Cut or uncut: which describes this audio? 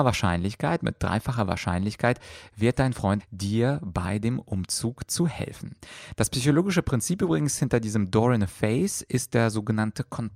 cut